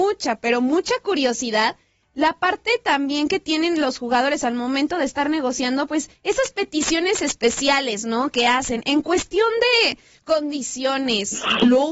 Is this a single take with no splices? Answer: yes; 0 cuts

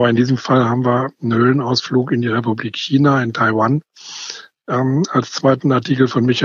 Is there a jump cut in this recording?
no; 0 cuts

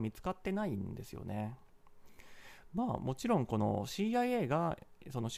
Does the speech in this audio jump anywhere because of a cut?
no; 0 cuts

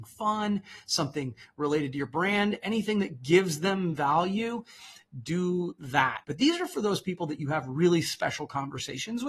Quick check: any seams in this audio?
yes; 1 cut; at 6.2 s

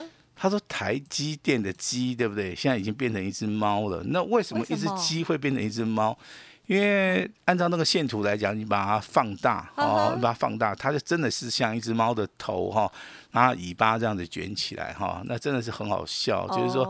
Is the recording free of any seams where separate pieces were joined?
yes; 0 cuts

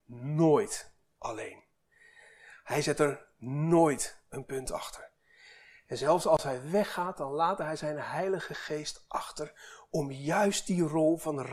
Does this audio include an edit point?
no; 0 cuts

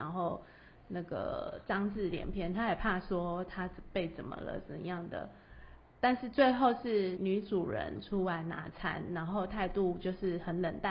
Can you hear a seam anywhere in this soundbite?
yes; 1 cut; at 7.2 s

